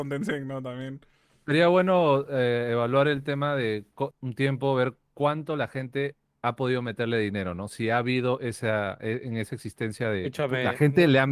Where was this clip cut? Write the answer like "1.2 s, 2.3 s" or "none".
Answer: 4.1 s